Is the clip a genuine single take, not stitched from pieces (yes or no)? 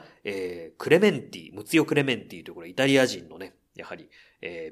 yes